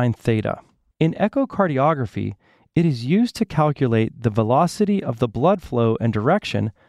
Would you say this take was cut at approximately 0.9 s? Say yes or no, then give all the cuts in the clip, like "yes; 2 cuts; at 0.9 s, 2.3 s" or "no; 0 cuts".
yes; 1 cut; at 0.9 s